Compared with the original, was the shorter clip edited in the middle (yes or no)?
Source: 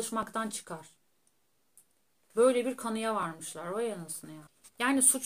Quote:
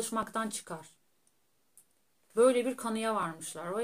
no